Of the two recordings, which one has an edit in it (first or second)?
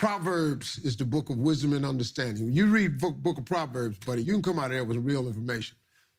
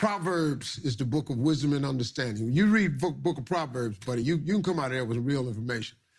first